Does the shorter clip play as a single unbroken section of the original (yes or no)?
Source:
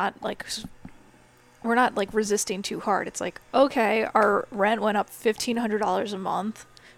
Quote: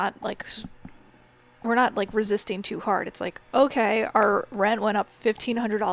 yes